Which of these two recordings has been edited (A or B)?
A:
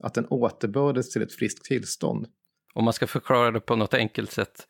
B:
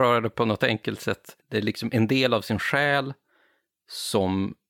B